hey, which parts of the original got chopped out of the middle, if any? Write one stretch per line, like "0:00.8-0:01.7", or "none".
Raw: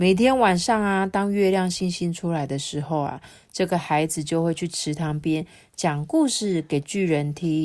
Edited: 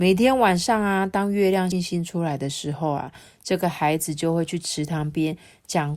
0:01.7-0:01.8